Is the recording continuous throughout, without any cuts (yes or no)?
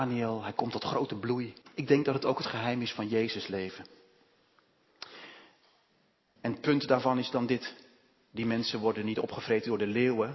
no